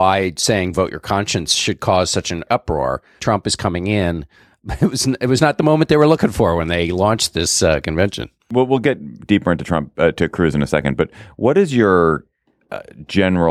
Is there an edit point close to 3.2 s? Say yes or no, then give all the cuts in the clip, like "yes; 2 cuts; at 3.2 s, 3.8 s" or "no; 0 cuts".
yes; 1 cut; at 3.2 s